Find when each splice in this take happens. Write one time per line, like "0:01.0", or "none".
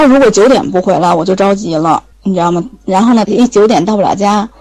0:02.1
0:03.2